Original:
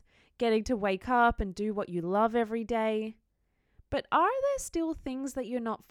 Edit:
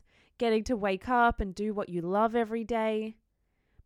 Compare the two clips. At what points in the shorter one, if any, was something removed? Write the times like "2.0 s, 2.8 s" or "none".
none

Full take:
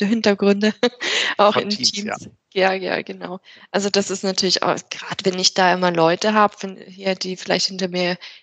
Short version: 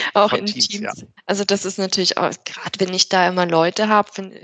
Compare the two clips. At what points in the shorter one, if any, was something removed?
1.2 s

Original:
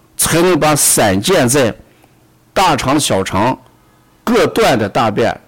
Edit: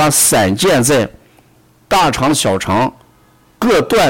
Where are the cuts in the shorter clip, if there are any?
none

